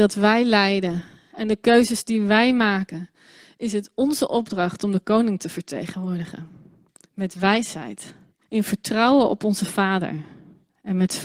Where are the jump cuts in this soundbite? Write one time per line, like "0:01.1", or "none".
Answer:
0:08.4